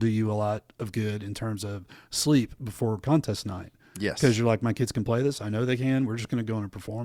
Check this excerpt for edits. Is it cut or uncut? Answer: uncut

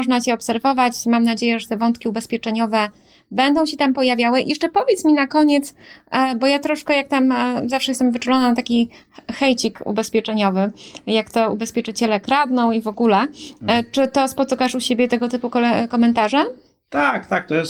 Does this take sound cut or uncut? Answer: uncut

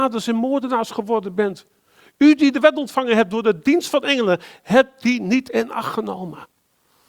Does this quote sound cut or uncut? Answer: uncut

